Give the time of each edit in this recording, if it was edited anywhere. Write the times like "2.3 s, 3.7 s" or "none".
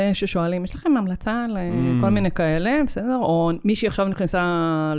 none